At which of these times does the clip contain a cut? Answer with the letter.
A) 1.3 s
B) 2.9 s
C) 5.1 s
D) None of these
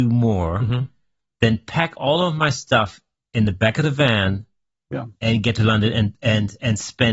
D